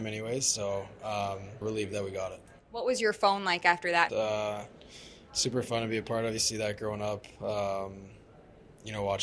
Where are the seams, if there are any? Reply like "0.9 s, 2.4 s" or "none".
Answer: 1.6 s, 4.1 s, 6.4 s